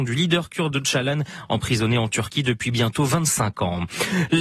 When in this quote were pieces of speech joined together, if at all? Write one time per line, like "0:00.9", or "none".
none